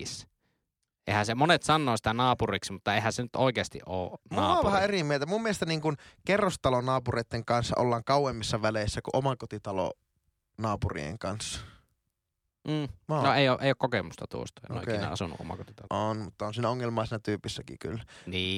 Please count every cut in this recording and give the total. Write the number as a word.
one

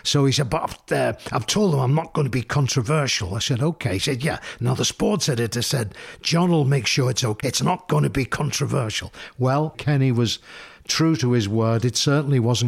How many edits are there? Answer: two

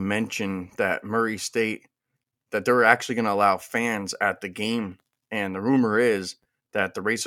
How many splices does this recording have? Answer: zero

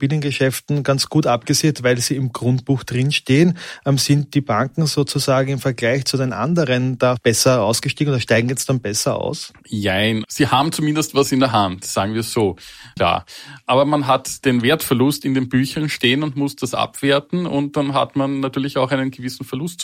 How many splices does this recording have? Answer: two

